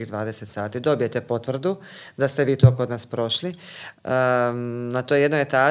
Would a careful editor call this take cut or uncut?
cut